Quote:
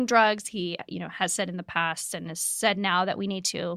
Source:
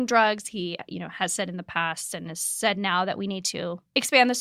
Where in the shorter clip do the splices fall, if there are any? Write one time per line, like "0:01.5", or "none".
none